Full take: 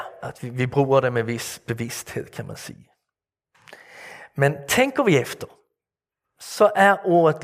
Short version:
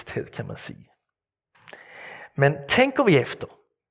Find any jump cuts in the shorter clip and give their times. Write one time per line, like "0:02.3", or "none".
none